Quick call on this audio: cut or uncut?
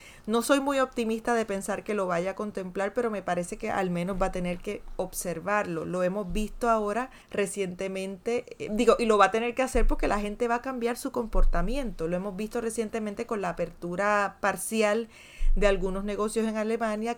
uncut